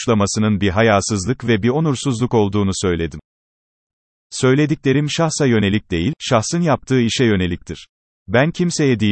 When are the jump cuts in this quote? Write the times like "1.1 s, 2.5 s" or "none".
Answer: 8.1 s